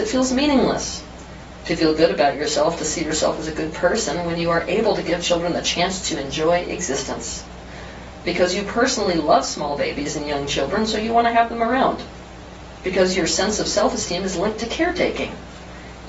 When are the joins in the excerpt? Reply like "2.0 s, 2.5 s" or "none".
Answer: 8.2 s